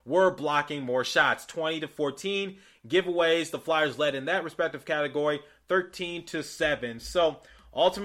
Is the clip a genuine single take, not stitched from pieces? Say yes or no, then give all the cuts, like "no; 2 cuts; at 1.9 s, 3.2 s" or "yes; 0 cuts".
yes; 0 cuts